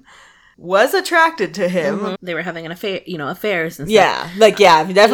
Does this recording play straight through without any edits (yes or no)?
no